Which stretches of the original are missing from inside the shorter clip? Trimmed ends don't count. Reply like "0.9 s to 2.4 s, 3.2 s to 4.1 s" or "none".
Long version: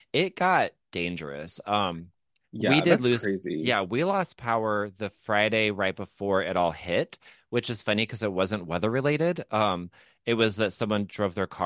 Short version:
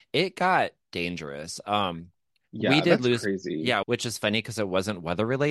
3.8 s to 7.5 s